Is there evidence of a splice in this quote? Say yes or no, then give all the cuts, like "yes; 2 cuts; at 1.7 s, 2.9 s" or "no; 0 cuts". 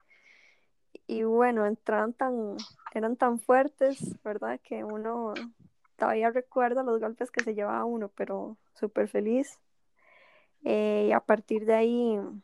no; 0 cuts